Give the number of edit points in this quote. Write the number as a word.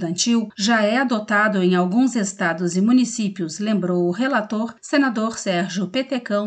zero